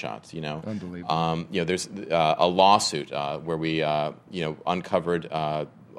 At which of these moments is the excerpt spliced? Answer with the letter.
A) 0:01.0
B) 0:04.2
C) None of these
C